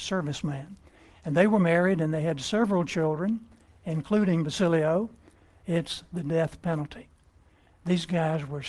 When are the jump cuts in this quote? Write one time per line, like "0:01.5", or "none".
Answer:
0:05.6